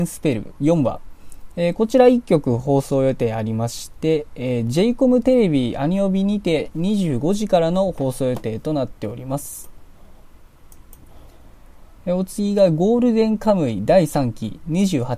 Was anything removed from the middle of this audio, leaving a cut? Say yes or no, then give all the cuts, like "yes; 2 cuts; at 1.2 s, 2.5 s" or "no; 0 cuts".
no; 0 cuts